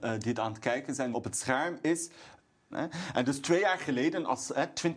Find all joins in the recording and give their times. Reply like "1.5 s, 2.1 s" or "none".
1.1 s, 2.7 s